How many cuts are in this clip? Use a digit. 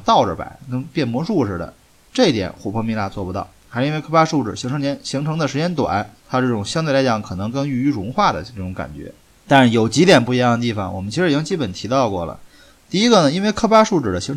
2